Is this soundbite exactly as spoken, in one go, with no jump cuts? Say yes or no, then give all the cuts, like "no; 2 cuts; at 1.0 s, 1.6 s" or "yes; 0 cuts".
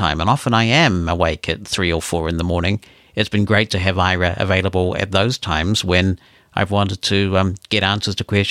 yes; 0 cuts